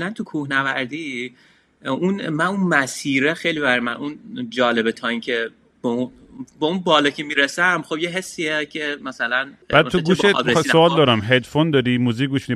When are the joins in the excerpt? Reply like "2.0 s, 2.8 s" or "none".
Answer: 9.6 s